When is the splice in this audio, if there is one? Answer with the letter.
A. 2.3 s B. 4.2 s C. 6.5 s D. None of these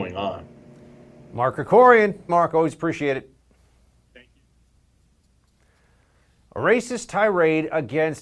A